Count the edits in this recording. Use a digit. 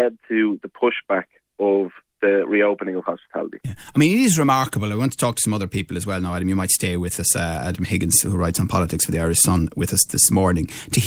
0